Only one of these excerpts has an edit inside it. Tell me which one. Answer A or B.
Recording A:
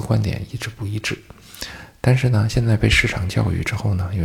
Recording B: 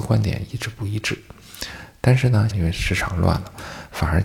B